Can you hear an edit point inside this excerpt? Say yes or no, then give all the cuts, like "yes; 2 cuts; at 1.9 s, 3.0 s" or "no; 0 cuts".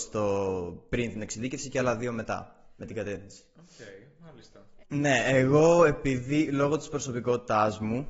yes; 1 cut; at 4.8 s